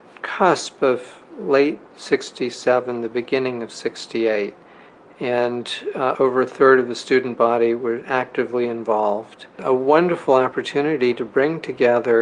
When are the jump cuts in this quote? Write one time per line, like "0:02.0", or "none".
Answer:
0:06.1